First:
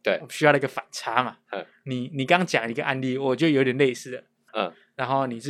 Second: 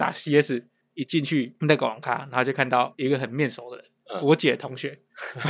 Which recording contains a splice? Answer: first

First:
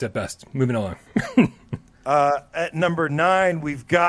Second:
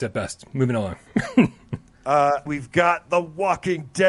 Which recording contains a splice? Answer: second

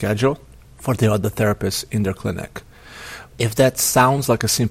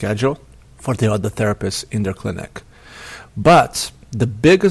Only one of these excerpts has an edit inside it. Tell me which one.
first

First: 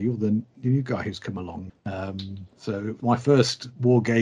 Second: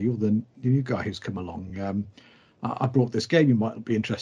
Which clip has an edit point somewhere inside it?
first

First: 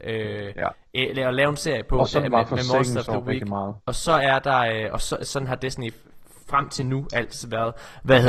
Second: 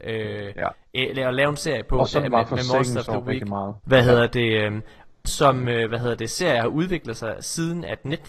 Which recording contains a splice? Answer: second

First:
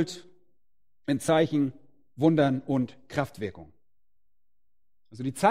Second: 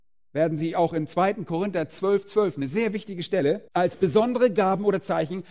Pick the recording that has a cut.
second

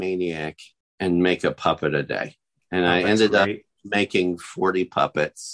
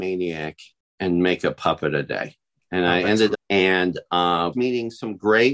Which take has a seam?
second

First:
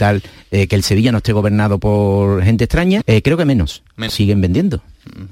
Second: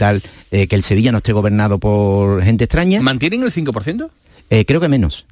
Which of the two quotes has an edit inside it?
first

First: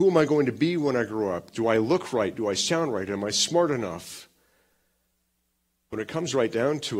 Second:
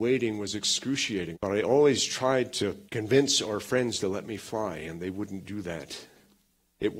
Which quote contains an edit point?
second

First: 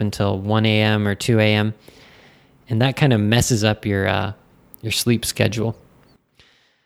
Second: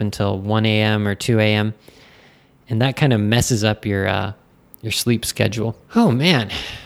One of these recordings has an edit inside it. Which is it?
second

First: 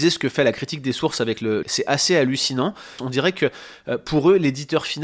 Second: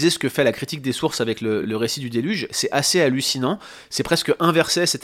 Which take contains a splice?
first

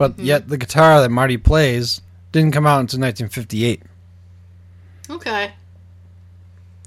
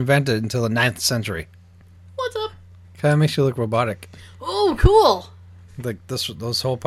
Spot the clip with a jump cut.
second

